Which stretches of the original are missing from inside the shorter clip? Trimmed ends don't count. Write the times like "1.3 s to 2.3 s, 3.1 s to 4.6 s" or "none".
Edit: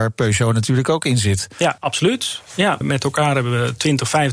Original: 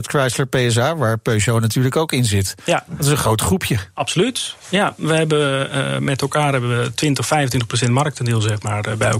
2.9 s to 3.9 s, 5.0 s to 6.0 s